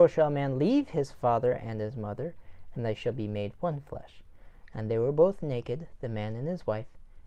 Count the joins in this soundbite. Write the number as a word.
one